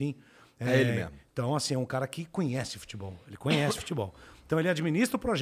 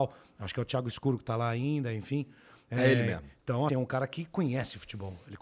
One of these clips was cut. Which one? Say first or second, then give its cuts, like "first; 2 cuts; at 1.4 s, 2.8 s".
second; 1 cut; at 3.7 s